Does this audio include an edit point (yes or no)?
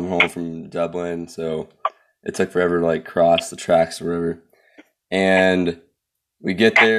no